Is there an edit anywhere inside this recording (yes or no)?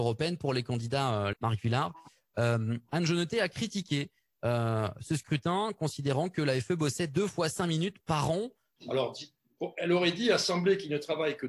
yes